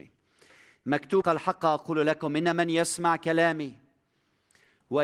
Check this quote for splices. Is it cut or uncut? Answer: cut